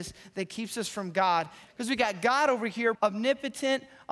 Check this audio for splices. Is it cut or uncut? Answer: cut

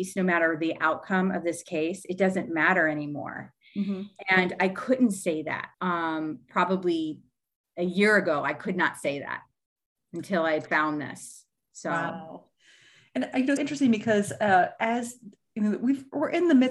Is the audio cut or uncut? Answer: cut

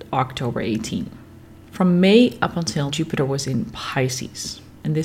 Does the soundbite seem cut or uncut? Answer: cut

